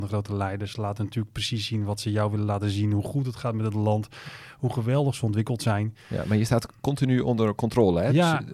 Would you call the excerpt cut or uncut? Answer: uncut